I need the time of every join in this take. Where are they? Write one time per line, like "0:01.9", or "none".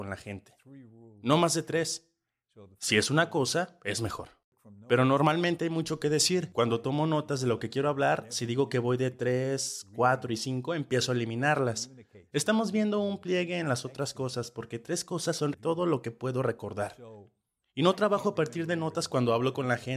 0:15.5